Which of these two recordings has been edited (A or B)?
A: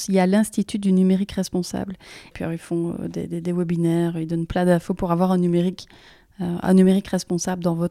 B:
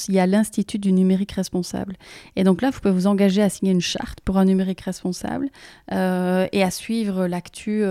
A